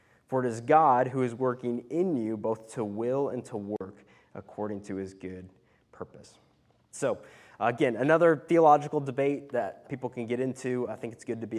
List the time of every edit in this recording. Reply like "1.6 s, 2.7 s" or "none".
6.9 s, 9.8 s